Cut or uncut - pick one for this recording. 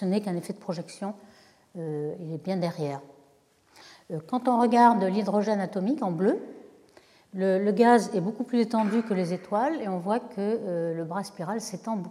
uncut